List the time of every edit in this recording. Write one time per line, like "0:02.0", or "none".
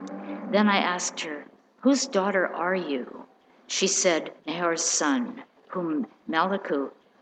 0:04.4